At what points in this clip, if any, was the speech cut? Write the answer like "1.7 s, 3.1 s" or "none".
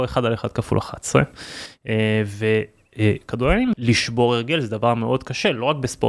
3.7 s